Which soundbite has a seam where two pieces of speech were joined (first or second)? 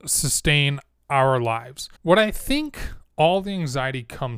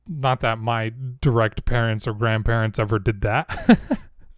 first